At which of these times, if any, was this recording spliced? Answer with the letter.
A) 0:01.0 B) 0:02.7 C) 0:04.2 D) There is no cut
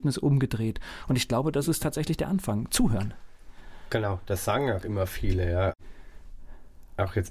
D